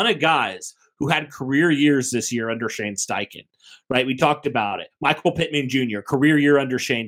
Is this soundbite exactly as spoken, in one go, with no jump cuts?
yes; 0 cuts

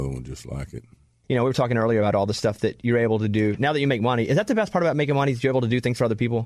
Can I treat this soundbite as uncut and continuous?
yes; 0 cuts

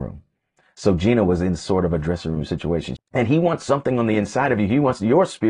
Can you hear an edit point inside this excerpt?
yes; 1 cut; at 3.0 s

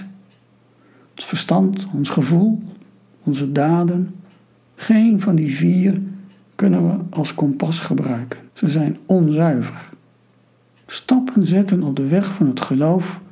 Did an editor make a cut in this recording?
yes; 2 cuts; at 8.5 s, 10.8 s

